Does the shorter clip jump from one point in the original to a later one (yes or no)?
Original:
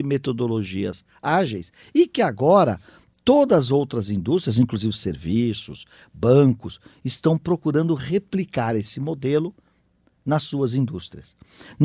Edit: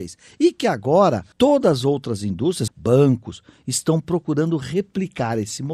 yes